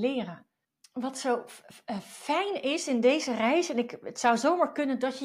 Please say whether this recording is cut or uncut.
uncut